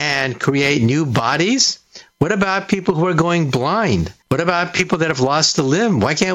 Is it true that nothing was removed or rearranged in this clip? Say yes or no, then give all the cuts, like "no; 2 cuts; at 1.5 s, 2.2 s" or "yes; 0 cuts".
no; 1 cut; at 4.2 s